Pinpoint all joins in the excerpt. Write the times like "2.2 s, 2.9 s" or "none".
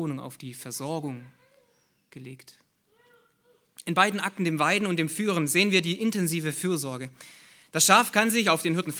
none